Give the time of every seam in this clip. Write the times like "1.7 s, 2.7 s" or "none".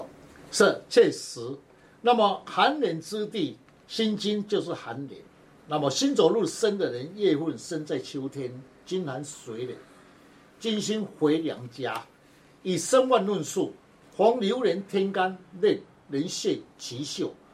none